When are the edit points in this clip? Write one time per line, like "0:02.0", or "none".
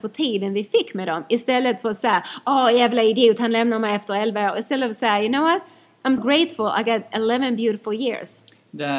0:06.2